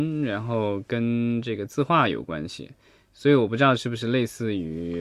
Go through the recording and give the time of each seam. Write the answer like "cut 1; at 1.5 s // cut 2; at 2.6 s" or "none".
none